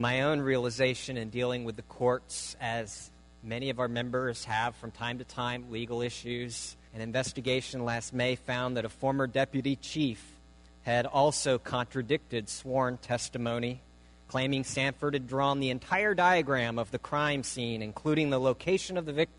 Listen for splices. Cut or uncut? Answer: cut